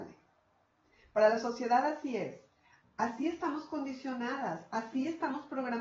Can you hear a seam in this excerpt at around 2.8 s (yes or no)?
yes